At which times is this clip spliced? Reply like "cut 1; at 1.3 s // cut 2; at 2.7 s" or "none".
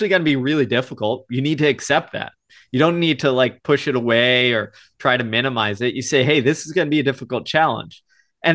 none